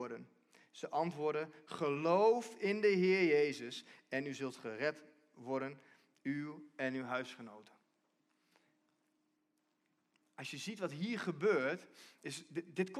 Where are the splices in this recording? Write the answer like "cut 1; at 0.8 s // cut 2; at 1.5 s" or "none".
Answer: none

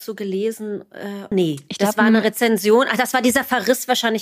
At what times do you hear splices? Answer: cut 1; at 1.3 s

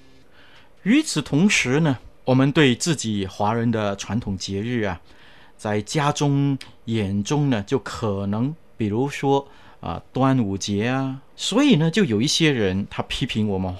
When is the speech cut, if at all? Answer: cut 1; at 2.1 s // cut 2; at 8.8 s // cut 3; at 11.3 s

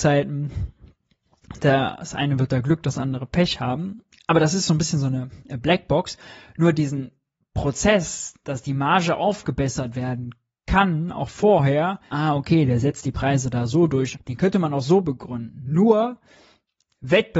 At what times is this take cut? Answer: cut 1; at 12.1 s // cut 2; at 14.1 s

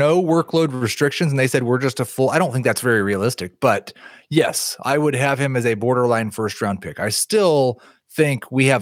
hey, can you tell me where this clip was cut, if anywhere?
none

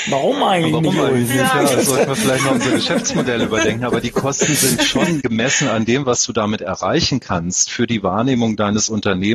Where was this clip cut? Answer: cut 1; at 5.2 s

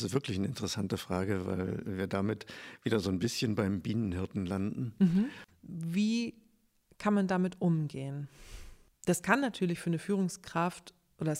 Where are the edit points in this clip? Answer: cut 1; at 5.5 s // cut 2; at 8.9 s

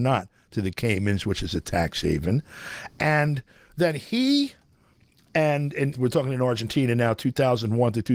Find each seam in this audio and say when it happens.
cut 1; at 5.9 s

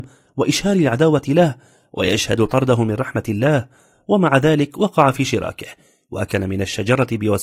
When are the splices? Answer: none

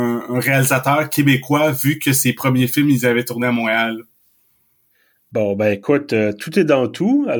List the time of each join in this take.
none

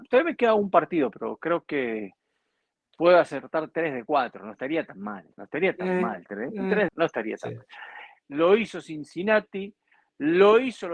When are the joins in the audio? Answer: cut 1; at 6.9 s // cut 2; at 8.2 s

